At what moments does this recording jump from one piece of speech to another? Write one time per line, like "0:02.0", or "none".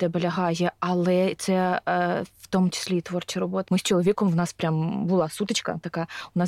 0:03.7